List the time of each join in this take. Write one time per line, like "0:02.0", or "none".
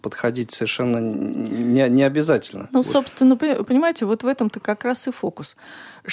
none